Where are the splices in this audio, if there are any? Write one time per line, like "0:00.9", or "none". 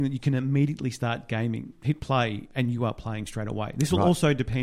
0:01.7